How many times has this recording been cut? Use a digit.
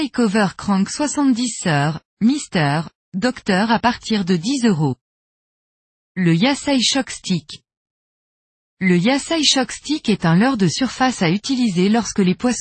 0